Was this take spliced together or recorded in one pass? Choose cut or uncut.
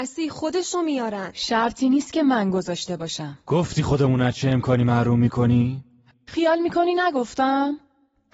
cut